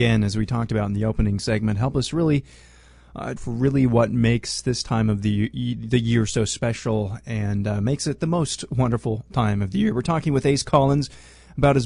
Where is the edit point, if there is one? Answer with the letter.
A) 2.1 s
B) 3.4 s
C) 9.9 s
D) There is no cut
B